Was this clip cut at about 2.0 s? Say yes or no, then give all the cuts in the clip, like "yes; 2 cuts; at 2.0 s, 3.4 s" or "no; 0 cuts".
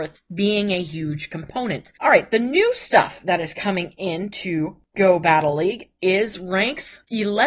yes; 1 cut; at 2.0 s